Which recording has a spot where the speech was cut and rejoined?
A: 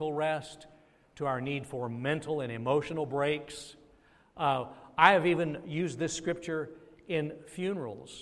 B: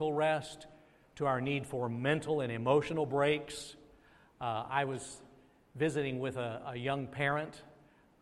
A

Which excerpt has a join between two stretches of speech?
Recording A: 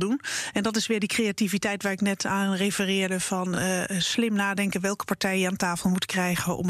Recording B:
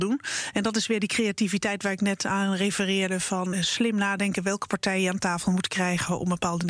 B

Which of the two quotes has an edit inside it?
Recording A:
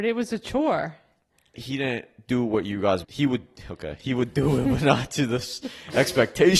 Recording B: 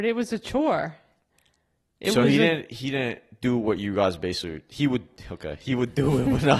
A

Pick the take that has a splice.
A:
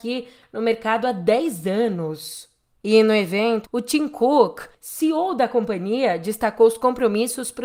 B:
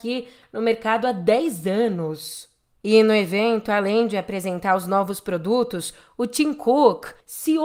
A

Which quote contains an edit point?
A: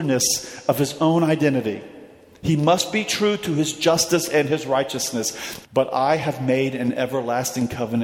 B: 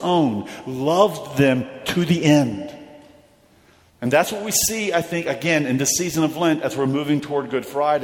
A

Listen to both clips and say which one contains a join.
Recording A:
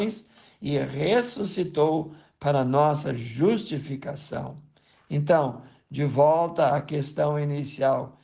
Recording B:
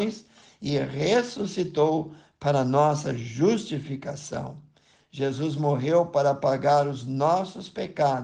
B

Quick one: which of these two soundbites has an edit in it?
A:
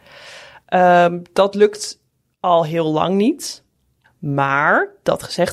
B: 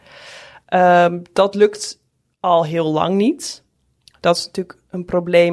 A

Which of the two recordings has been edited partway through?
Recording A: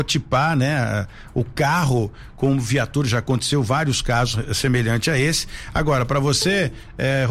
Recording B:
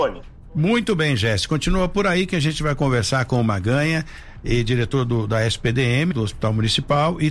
B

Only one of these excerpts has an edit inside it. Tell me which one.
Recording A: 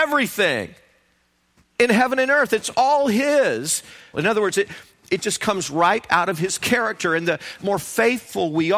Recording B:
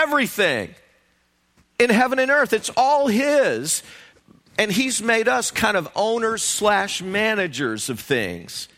A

